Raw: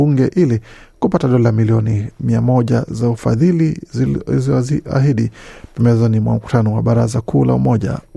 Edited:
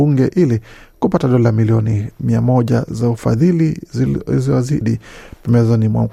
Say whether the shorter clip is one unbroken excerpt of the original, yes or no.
no